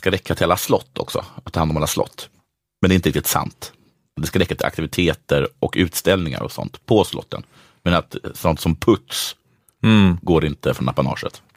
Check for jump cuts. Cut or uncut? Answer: uncut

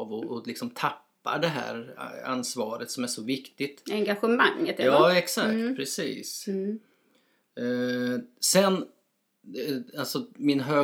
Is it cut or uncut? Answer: uncut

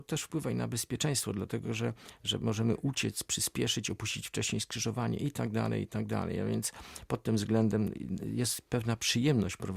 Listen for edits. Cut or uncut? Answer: uncut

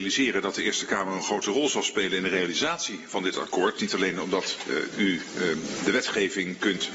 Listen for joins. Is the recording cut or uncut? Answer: uncut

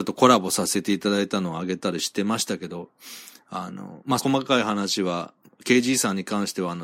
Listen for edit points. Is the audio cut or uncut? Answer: cut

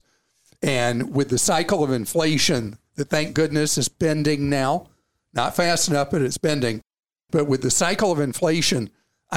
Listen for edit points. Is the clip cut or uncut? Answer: uncut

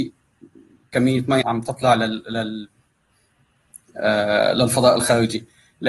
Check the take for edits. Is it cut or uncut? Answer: cut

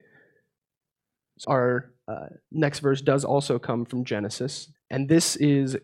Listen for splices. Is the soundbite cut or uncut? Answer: cut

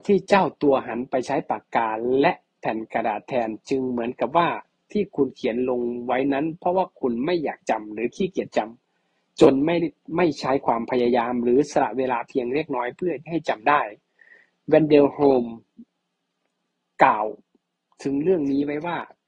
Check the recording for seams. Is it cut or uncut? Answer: uncut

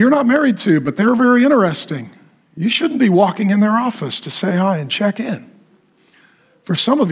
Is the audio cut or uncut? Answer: uncut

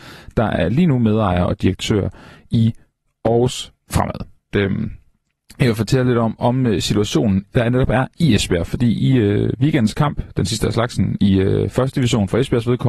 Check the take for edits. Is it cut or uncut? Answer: cut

